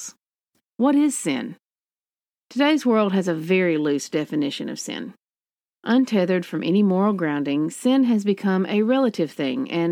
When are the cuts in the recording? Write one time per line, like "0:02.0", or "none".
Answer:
none